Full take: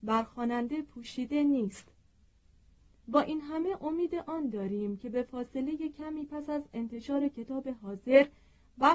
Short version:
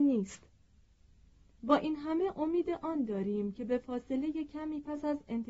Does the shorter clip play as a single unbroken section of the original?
yes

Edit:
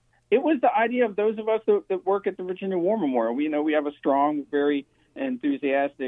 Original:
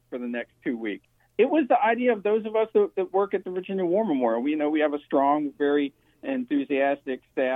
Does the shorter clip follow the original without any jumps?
yes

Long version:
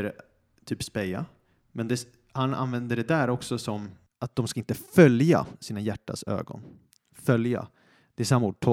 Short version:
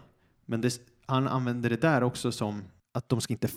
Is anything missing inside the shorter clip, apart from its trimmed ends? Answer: no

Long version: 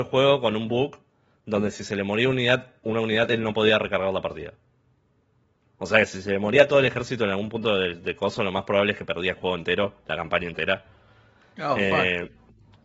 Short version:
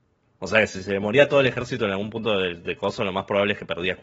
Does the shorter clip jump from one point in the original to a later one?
no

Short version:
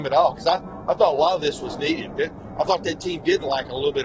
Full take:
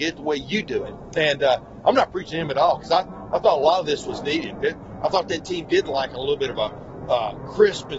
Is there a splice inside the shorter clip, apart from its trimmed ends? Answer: no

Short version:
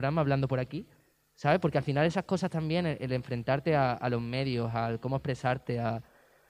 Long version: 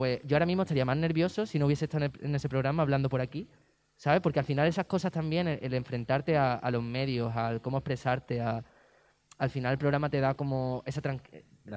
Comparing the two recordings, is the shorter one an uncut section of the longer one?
yes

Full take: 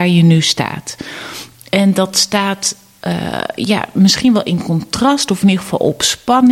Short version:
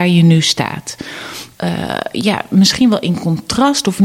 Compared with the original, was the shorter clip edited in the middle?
yes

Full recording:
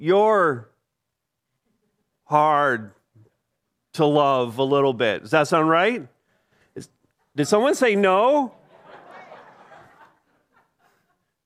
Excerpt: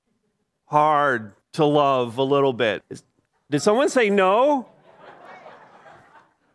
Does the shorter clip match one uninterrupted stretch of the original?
no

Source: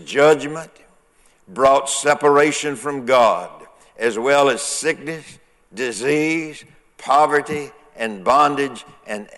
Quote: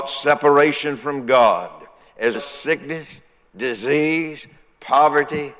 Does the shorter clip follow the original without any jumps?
no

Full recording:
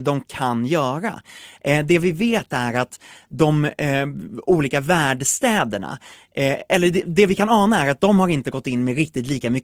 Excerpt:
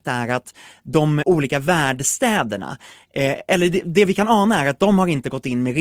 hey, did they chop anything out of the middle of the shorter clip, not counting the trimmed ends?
yes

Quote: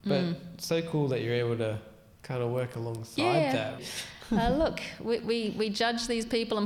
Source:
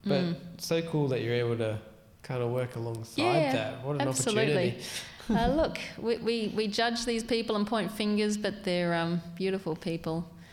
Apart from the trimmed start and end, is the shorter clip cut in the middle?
yes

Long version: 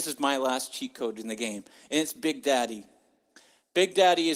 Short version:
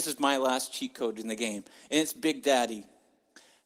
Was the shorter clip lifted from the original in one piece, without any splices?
yes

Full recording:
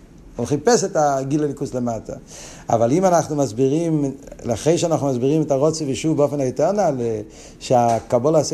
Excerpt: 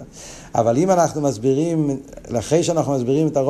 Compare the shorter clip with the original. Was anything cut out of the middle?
no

